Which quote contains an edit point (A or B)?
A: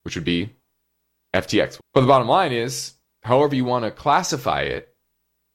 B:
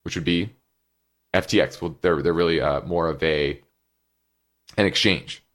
A